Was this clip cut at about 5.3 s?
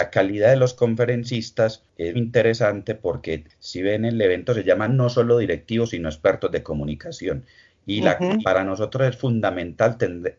no; 2 cuts; at 2.1 s, 8.4 s

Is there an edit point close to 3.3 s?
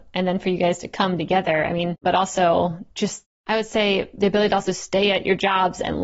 no; 1 cut; at 2.0 s

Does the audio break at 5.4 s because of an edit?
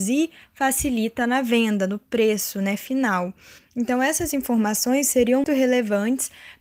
yes; 2 cuts; at 3.6 s, 5.4 s

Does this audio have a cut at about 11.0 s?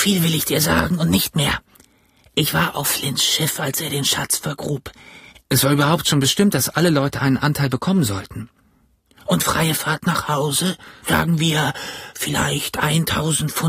yes; 2 cuts; at 5.4 s, 11.0 s

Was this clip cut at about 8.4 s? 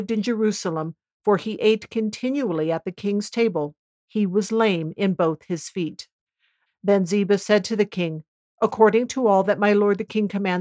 no; 1 cut; at 6.7 s

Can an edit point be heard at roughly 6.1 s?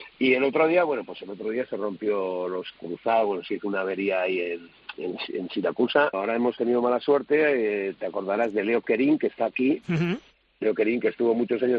yes; 1 cut; at 6.1 s

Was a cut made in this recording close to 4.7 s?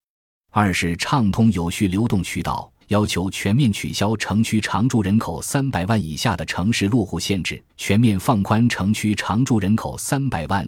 no; 2 cuts; at 2.8 s, 7.7 s

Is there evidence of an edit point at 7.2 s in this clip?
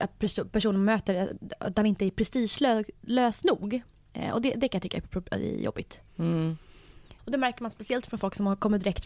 yes; 2 cuts; at 6.1 s, 7.2 s

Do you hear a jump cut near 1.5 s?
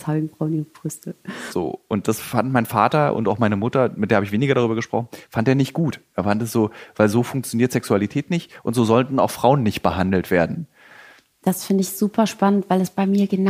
yes; 1 cut; at 1.5 s

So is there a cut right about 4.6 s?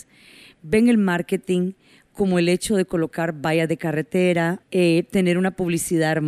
yes; 1 cut; at 4.6 s

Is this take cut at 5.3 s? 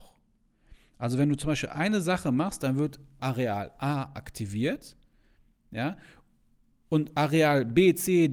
no; 1 cut; at 3.2 s

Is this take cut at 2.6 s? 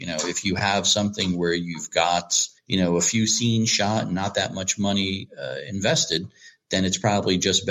yes; 1 cut; at 2.6 s

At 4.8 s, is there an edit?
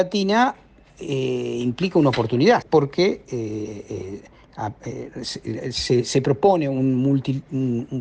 no; 1 cut; at 2.6 s

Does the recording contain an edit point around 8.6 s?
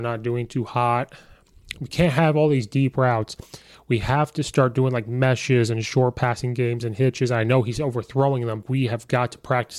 yes; 2 cuts; at 1.7 s, 8.6 s

